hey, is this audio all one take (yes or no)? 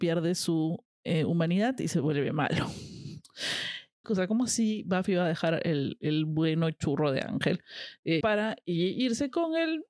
no